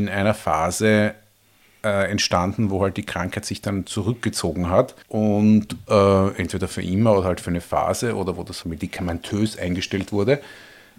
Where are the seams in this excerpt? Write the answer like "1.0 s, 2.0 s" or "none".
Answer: 5.0 s, 8.6 s